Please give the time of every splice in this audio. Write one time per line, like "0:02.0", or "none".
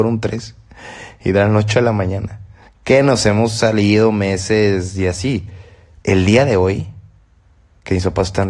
0:02.7
0:06.0